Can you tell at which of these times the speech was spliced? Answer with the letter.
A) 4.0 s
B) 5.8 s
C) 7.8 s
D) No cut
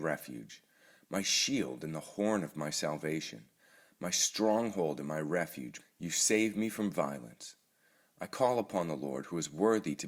B